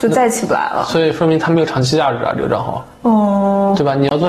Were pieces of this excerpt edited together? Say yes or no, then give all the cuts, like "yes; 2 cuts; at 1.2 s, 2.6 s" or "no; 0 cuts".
yes; 1 cut; at 2.9 s